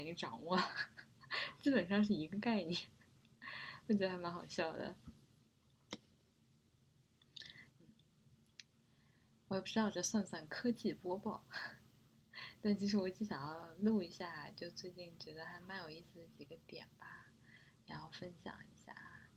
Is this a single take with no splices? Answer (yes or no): no